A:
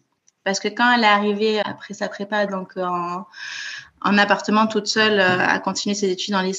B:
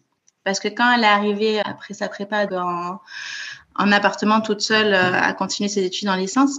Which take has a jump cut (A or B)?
B